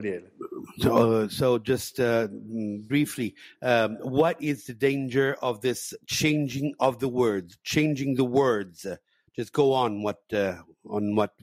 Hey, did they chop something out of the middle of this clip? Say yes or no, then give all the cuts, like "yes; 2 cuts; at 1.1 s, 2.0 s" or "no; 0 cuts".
no; 0 cuts